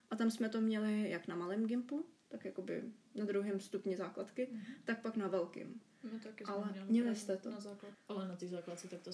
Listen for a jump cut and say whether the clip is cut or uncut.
cut